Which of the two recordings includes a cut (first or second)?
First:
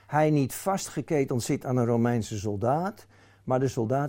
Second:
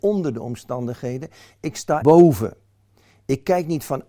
second